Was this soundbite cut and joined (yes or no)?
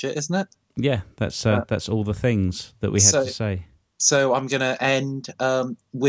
no